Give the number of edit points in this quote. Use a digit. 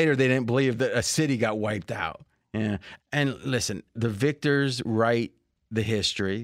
2